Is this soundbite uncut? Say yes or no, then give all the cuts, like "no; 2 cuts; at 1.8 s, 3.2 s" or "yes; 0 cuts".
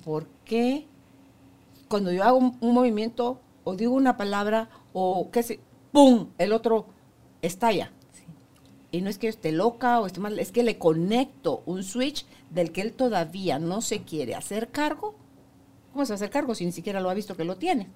yes; 0 cuts